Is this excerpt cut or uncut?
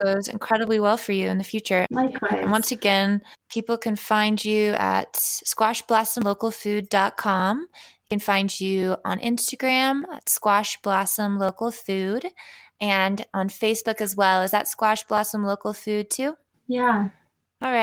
uncut